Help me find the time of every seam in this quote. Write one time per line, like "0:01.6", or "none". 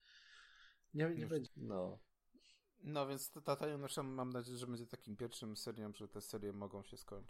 0:01.5
0:05.9